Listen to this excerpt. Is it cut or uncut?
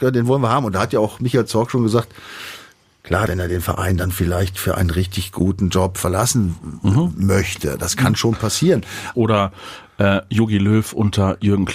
cut